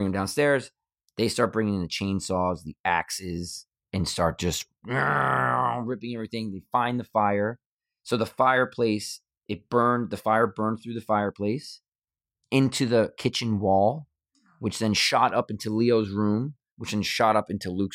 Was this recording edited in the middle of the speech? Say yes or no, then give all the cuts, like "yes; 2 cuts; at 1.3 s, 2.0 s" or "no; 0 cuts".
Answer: no; 0 cuts